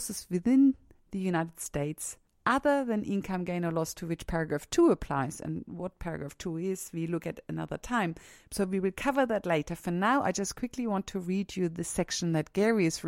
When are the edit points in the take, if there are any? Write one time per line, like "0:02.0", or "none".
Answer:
0:08.5

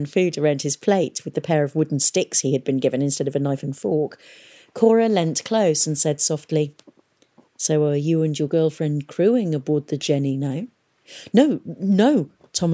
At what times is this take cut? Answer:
none

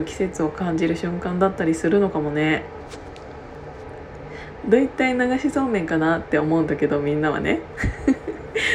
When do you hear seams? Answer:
0:04.6

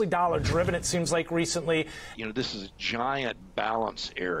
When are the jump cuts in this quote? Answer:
0:02.1

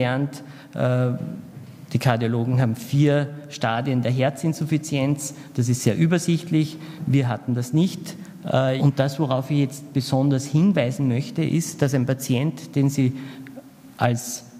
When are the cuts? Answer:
0:08.8

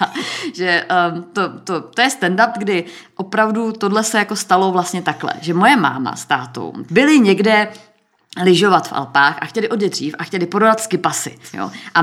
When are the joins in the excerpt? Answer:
0:02.5
0:06.9

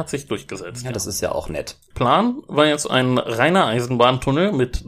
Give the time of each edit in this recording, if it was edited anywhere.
0:01.9

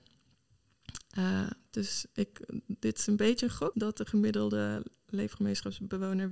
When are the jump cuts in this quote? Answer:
0:03.7

